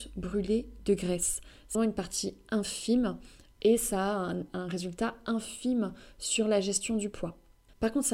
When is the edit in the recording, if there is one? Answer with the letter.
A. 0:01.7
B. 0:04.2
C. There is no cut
A